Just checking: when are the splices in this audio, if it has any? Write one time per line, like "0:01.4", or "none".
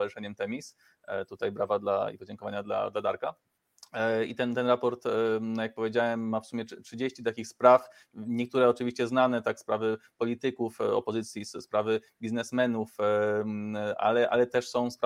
none